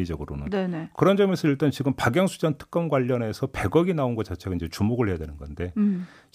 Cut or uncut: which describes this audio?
cut